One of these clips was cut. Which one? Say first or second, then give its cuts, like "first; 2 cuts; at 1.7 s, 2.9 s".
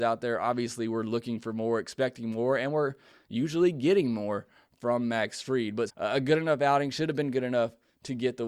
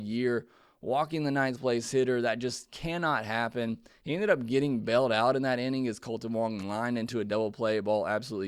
first; 1 cut; at 5.9 s